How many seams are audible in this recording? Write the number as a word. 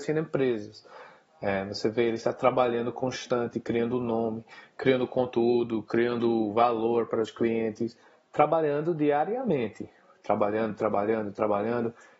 zero